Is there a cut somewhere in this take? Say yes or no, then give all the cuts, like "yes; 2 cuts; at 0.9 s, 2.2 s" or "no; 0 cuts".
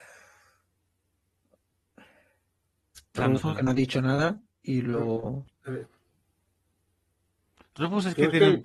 yes; 1 cut; at 3.2 s